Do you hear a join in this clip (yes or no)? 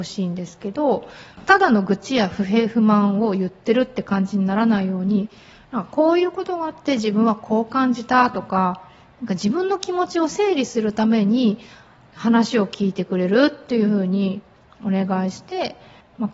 no